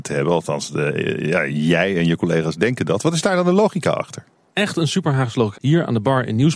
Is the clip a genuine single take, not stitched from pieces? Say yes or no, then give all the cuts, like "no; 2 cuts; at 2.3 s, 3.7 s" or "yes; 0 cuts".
no; 2 cuts; at 4.5 s, 5.5 s